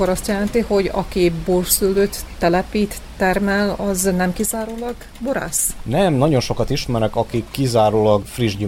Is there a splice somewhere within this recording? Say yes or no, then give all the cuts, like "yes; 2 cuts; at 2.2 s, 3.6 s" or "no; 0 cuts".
no; 0 cuts